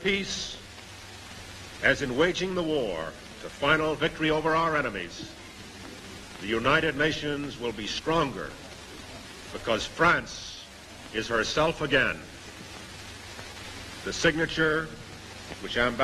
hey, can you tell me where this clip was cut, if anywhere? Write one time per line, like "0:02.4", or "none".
none